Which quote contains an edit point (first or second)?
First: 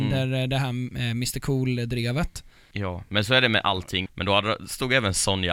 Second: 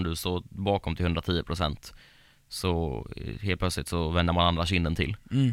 first